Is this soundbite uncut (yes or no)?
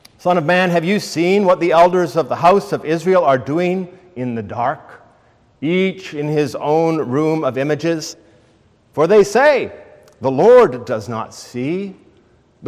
yes